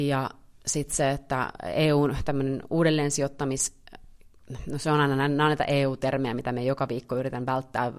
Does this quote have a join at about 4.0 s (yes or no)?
no